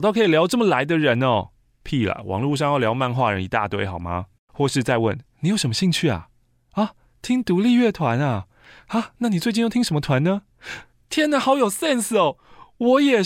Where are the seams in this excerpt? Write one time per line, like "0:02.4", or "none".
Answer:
none